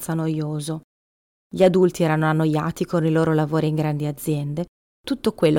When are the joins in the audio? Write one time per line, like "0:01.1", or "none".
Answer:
0:01.3